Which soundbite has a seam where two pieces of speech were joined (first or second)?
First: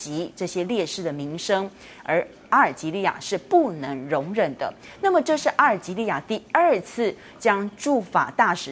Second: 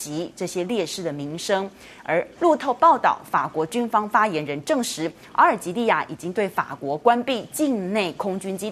second